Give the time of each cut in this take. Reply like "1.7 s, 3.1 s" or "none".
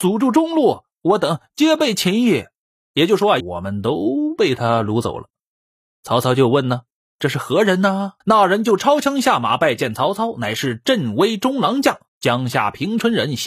3.4 s, 8.2 s, 12.1 s